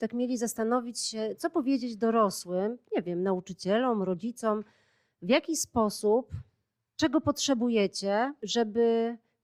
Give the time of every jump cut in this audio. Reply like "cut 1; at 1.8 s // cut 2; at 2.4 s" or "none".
none